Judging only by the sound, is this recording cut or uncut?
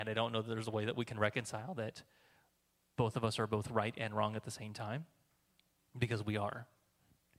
uncut